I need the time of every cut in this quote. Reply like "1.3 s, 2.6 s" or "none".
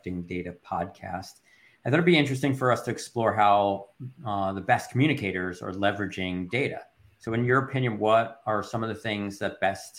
none